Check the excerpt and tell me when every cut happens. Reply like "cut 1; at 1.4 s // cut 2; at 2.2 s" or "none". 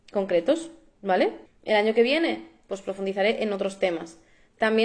cut 1; at 1.5 s